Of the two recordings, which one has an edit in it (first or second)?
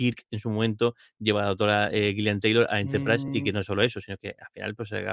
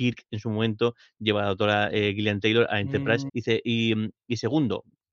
second